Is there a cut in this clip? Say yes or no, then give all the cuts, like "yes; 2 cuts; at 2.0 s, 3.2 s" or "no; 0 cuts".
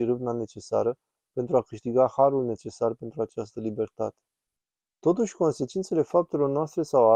yes; 1 cut; at 4.9 s